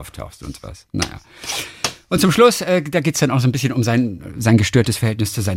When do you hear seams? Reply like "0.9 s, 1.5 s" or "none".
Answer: none